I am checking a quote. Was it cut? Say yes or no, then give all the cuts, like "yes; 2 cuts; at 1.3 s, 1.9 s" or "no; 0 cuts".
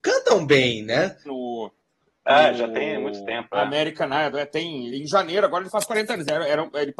yes; 2 cuts; at 1.2 s, 4.9 s